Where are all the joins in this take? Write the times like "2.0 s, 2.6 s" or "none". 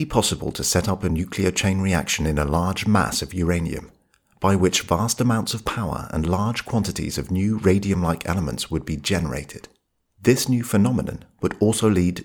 none

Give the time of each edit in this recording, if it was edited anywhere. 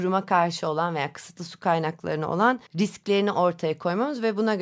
2.7 s

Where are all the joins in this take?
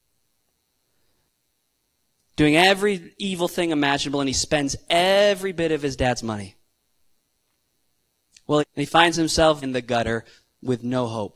8.6 s, 9.6 s

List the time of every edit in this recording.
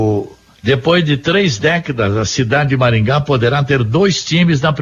none

